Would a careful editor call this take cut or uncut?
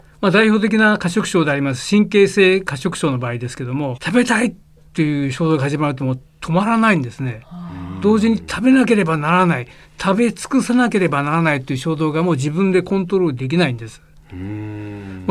cut